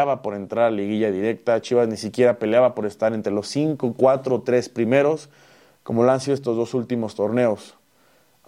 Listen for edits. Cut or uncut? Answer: uncut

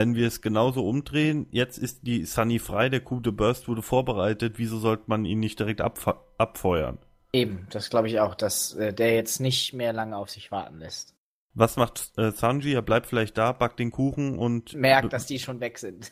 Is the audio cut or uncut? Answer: uncut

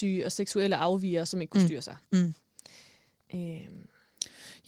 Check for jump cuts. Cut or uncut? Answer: uncut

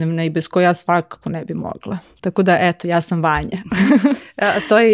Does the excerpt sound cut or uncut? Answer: uncut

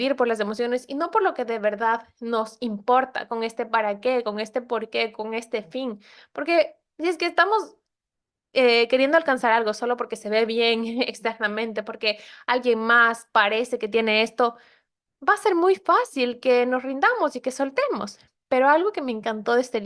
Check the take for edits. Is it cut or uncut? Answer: uncut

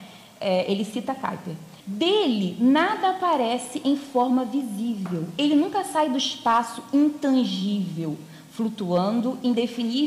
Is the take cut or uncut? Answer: cut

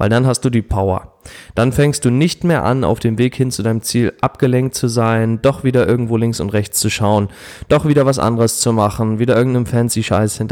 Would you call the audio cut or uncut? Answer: uncut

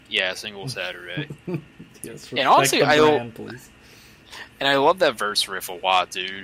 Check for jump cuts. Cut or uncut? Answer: uncut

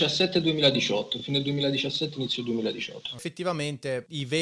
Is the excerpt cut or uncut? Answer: uncut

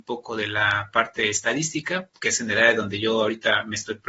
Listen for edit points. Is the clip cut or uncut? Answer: uncut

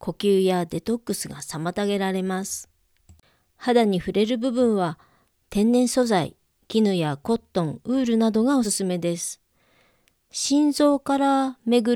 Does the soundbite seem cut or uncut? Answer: cut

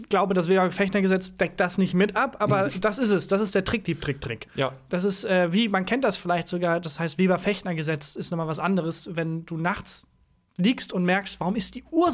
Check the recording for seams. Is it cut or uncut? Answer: cut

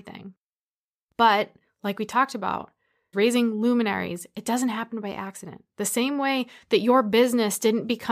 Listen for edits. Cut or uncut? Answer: cut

